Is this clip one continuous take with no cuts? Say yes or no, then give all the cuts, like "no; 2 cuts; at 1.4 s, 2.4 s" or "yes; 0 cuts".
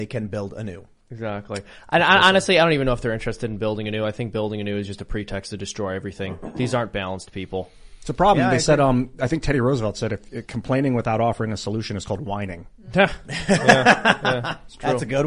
yes; 0 cuts